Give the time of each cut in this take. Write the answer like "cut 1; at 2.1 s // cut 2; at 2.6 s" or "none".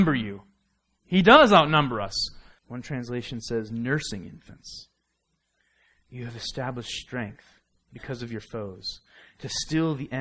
cut 1; at 2.6 s